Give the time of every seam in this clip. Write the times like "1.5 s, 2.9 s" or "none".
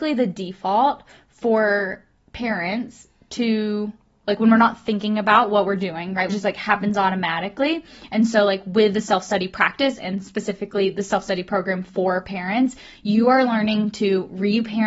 6.3 s